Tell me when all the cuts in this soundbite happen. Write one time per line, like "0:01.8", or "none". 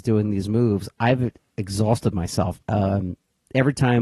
0:02.6